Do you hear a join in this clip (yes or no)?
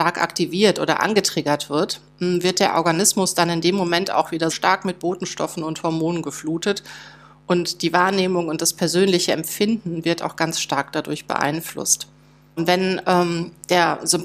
yes